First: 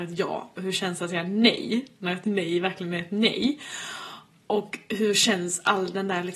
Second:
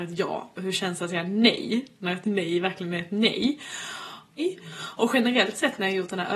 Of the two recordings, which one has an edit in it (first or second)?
second